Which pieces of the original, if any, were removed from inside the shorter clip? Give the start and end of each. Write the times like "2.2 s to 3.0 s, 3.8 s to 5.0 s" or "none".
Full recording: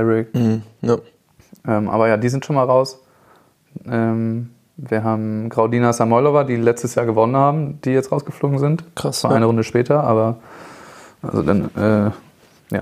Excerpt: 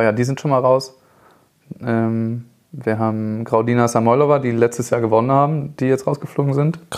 none